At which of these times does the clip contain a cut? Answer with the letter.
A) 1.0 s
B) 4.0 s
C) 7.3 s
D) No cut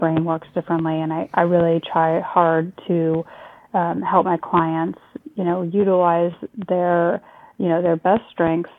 D